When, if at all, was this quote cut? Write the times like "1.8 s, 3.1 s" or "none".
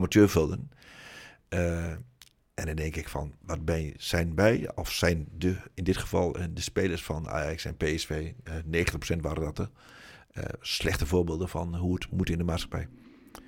none